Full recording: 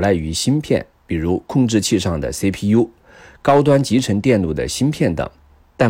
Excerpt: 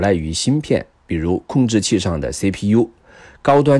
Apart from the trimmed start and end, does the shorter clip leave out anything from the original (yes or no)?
no